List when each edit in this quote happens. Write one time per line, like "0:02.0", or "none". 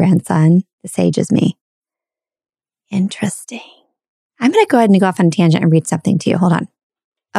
none

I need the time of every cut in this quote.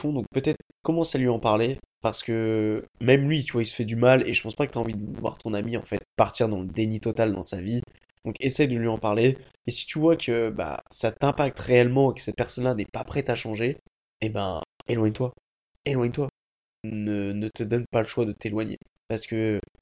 none

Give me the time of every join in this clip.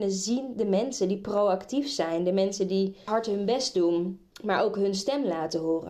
0:03.1
0:04.3

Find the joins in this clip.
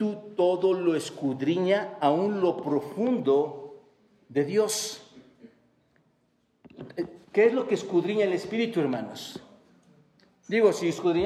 0:07.2

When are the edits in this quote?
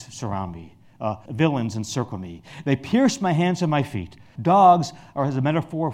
0:01.3
0:04.3

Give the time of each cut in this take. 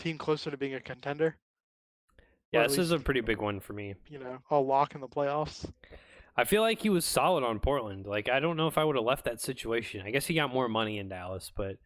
0:04.4

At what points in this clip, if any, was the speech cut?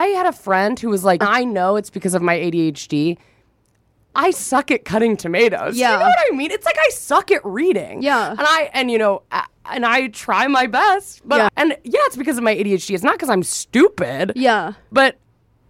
0:01.2
0:04.3
0:11.5

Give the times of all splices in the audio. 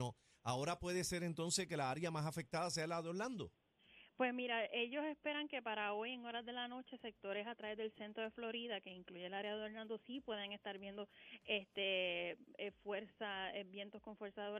none

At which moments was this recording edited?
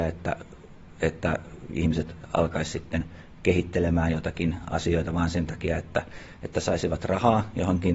none

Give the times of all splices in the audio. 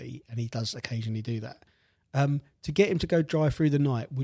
none

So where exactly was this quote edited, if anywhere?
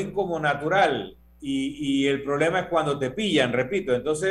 none

